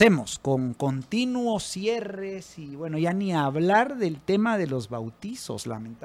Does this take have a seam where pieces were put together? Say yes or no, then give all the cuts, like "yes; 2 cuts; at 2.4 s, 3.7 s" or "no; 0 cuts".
no; 0 cuts